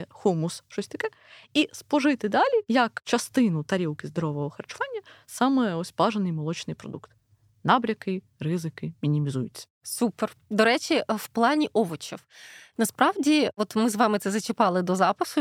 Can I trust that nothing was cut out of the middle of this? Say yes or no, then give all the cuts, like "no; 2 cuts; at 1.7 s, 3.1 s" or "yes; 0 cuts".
yes; 0 cuts